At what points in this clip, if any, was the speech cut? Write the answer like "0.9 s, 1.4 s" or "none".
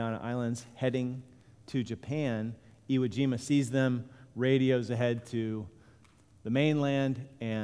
none